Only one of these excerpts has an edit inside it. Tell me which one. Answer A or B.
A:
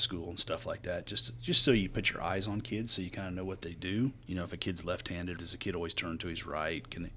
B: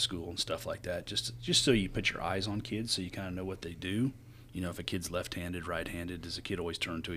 A